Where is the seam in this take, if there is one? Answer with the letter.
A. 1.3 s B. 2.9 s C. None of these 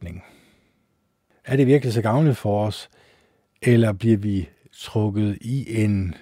A